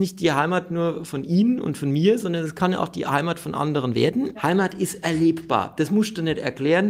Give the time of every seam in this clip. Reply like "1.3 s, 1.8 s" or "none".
4.3 s